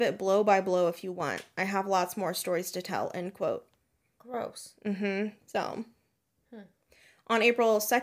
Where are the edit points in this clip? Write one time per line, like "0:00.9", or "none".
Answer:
0:05.4